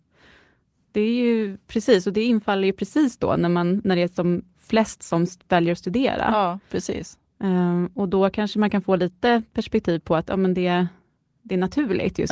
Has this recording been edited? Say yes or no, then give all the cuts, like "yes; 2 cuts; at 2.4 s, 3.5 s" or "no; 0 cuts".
no; 0 cuts